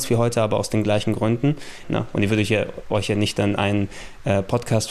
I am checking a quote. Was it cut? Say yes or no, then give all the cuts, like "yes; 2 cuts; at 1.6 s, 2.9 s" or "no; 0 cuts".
yes; 1 cut; at 1.8 s